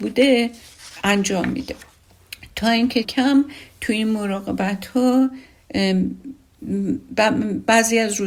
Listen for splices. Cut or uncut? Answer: cut